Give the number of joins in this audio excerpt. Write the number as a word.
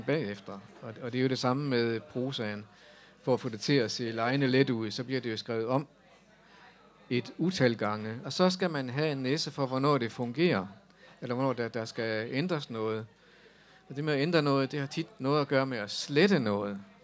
zero